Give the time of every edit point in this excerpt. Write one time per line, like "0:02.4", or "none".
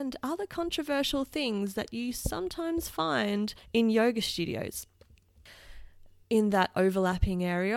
0:06.2